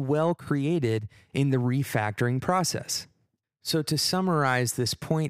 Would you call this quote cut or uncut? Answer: uncut